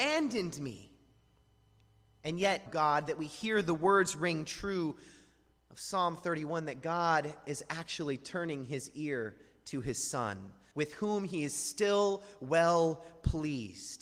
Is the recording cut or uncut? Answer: cut